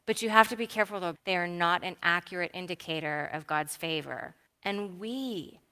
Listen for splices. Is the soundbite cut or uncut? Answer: cut